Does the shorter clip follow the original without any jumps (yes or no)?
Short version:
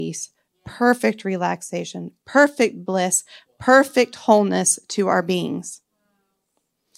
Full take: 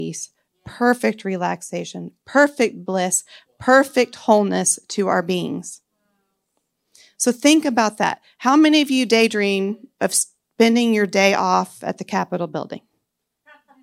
yes